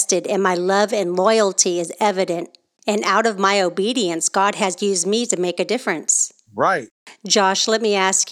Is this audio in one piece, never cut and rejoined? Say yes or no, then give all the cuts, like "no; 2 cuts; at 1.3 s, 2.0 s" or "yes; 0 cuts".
yes; 0 cuts